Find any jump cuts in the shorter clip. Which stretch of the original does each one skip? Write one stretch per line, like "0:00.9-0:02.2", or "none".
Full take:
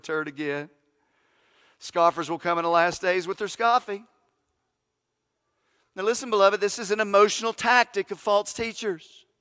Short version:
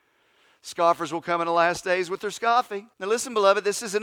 0:04.1-0:05.9